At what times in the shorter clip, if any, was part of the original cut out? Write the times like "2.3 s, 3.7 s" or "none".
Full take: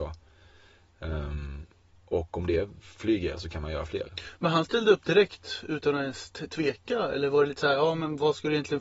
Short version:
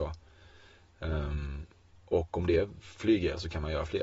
none